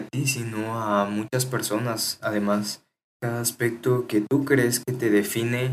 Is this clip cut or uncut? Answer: cut